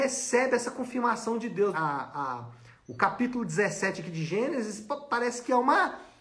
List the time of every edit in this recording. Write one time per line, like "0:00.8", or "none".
0:01.7